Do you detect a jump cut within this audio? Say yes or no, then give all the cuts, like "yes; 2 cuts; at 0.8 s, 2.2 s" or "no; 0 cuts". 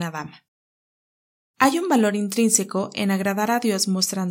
no; 0 cuts